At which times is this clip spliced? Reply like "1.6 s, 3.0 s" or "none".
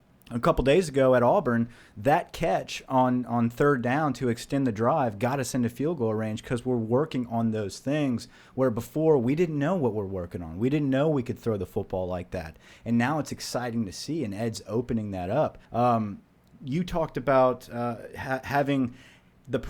15.7 s